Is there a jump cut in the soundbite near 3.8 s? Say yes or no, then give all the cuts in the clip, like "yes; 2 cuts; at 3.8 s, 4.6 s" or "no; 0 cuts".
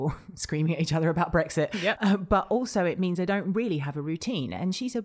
no; 1 cut; at 1.9 s